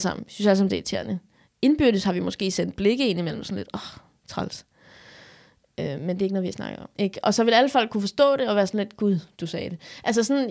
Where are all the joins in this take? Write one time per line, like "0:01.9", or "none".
0:06.9